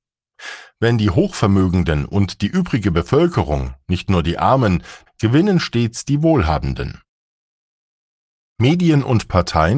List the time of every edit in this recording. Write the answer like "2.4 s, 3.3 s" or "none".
5.1 s